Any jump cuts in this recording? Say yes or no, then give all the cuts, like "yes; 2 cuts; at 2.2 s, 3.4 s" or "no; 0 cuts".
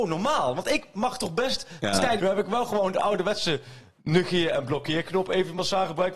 yes; 1 cut; at 2.2 s